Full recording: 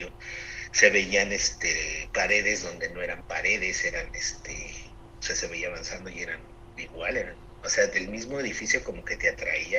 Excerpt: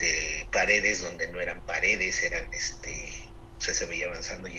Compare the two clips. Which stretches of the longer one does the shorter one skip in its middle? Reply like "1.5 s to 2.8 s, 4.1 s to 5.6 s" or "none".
none

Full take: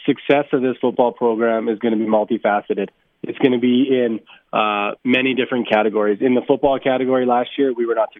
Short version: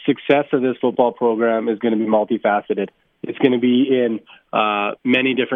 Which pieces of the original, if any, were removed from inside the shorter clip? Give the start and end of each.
none

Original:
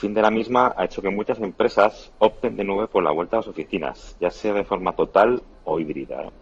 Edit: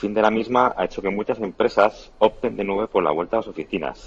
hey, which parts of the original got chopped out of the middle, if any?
none

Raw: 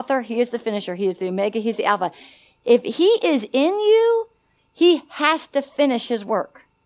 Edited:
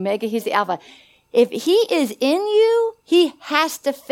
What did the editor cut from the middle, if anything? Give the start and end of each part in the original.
4.3 s to 4.7 s

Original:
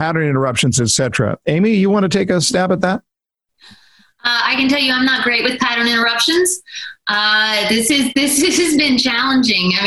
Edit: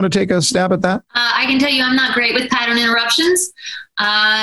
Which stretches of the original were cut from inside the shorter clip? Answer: 3.1 s to 4.2 s

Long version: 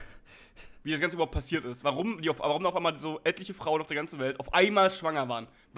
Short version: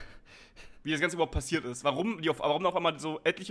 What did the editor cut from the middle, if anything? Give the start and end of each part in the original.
none

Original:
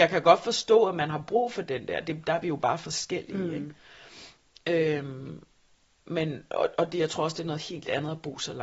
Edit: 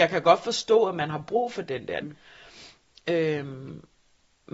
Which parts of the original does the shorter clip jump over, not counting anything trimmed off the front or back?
2.0 s to 3.6 s

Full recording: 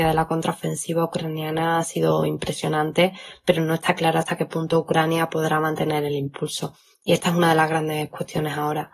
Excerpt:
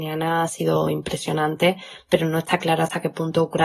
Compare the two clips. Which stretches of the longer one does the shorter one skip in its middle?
none

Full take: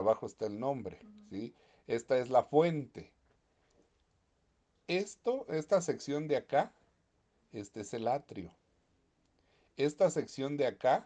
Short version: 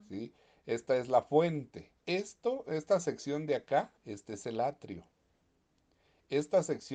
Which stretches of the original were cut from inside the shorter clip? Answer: 3.2 s to 4.8 s, 6.8 s to 7.4 s

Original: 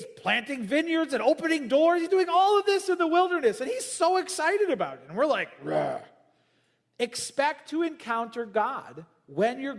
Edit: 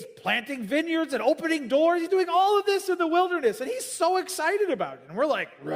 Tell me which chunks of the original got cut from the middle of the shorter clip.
none

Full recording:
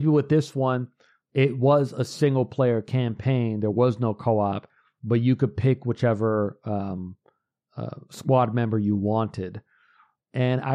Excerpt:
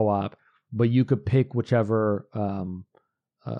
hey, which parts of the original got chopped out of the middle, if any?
none

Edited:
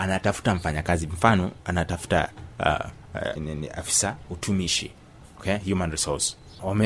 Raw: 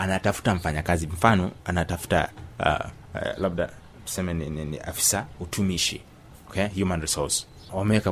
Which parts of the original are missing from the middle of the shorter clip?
3.4 s to 4.5 s

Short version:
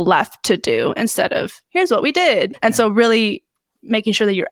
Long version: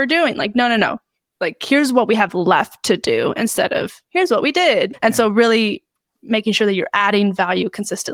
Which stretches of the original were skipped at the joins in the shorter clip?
none

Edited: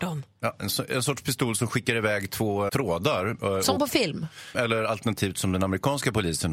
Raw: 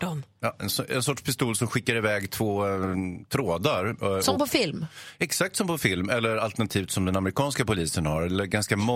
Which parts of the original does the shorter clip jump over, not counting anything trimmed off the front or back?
2.7 s to 3.3 s, 5.1 s to 6.1 s

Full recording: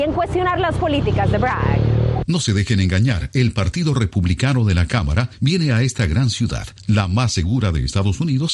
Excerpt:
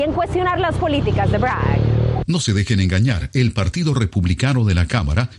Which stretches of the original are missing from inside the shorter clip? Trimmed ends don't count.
none

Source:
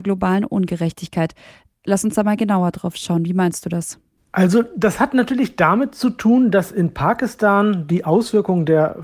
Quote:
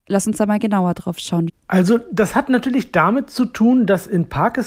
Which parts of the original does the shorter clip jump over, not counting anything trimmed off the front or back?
3.3 s to 4.1 s

